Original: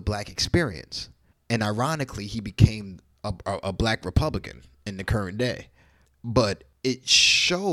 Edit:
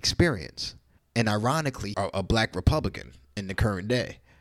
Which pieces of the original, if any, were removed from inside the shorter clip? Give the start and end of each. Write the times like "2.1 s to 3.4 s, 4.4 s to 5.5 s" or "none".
2.3 s to 3.4 s